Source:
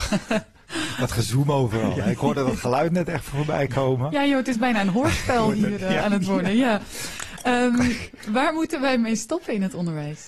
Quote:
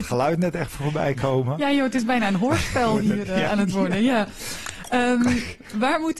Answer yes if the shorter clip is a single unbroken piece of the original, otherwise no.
yes